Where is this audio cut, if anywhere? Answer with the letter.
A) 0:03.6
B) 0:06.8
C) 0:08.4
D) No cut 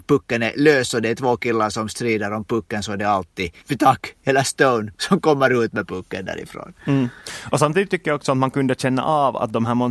A